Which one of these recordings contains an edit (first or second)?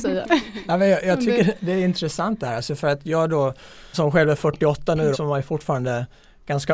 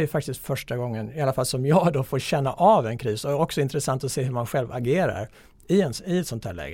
first